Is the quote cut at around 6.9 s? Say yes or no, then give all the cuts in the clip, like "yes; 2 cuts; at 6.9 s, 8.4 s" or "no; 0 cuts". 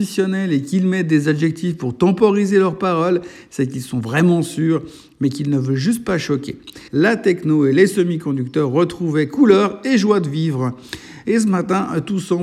yes; 2 cuts; at 6.9 s, 11.2 s